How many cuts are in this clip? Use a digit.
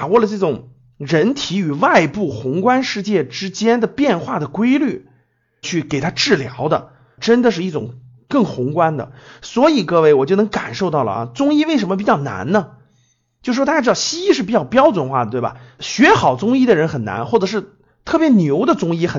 1